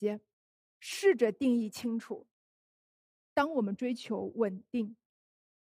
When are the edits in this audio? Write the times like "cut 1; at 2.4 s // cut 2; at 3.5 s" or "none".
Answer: none